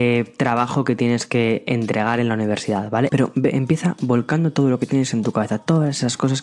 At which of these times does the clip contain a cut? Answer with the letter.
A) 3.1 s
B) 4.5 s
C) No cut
A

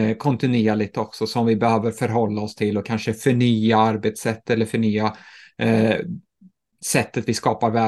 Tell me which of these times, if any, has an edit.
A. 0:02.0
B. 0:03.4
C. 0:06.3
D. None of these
D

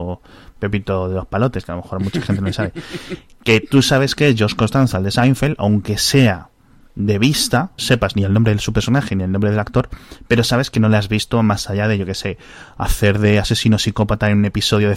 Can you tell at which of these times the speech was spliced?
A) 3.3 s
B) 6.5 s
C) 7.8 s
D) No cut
C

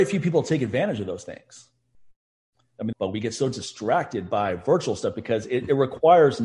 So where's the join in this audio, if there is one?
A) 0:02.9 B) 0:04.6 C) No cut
A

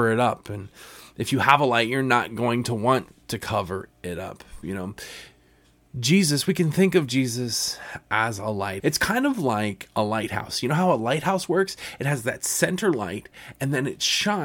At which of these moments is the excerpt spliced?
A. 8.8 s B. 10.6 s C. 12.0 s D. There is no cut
A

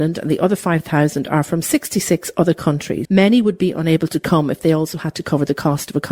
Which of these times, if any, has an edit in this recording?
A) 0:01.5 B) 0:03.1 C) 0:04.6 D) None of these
B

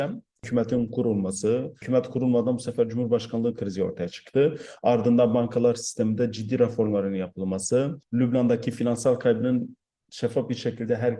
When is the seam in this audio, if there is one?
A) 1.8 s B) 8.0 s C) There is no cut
C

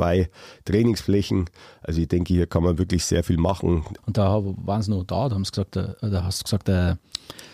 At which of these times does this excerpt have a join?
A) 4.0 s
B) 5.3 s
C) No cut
A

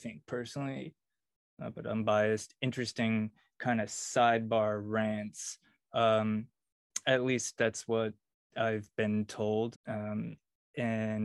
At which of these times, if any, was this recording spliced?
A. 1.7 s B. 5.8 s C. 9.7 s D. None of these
C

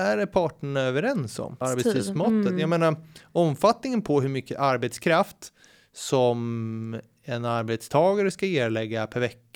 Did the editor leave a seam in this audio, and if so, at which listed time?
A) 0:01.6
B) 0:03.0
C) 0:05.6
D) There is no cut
A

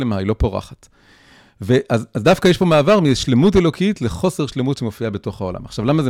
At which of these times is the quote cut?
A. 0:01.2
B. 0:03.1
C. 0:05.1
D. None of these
D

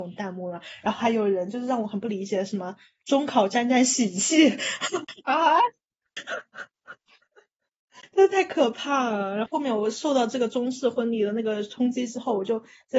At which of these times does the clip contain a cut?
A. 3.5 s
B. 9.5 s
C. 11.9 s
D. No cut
B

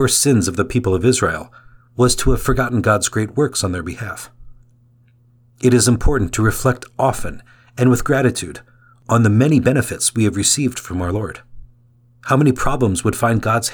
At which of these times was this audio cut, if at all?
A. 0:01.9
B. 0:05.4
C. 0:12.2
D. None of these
C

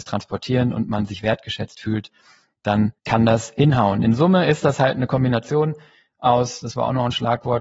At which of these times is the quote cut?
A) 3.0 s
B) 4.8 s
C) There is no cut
A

